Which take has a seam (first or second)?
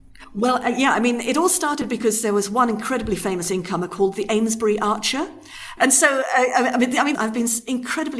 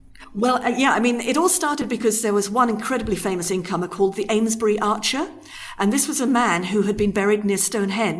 first